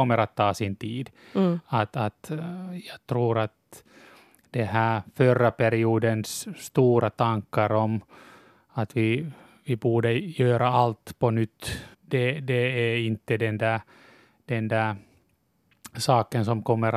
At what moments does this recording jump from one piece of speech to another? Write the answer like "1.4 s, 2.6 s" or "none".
11.9 s